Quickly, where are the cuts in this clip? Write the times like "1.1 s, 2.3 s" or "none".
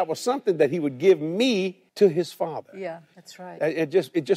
1.9 s, 3.1 s